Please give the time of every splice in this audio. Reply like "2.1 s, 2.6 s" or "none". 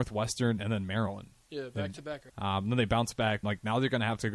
2.3 s, 3.4 s